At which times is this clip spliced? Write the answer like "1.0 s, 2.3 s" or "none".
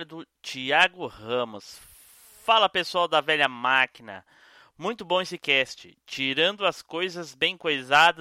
none